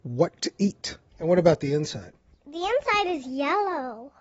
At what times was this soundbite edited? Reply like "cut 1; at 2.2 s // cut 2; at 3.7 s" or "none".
cut 1; at 1.1 s